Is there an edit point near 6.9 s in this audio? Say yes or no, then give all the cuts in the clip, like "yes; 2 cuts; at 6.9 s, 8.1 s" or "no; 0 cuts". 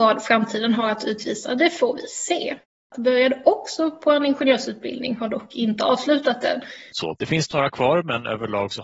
yes; 2 cuts; at 2.9 s, 6.9 s